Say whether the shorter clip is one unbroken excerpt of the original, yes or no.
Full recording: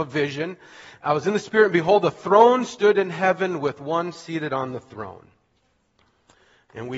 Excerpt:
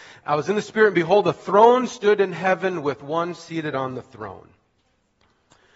yes